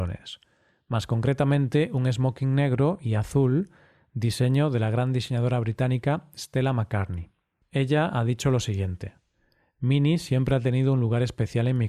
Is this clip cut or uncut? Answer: uncut